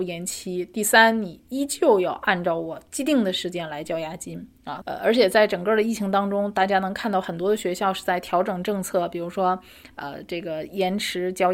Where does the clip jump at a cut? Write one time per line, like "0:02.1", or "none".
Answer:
0:04.8